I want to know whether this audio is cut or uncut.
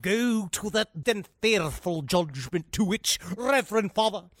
cut